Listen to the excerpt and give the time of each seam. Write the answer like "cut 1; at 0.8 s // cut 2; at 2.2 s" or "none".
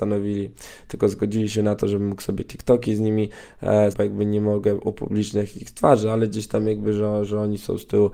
cut 1; at 3.9 s